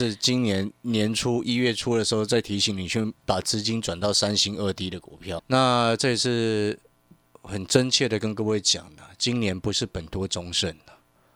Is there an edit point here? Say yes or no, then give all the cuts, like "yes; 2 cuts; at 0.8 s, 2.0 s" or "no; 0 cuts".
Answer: yes; 1 cut; at 5.4 s